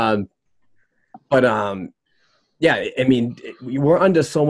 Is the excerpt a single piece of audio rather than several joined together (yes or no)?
yes